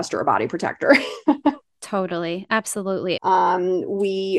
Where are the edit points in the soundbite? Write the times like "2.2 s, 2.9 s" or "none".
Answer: 3.2 s